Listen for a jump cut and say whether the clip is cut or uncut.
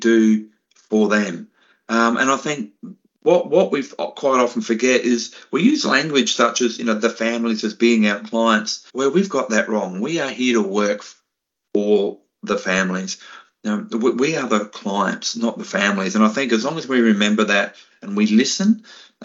cut